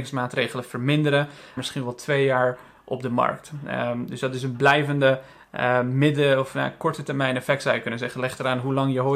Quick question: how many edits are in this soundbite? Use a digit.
1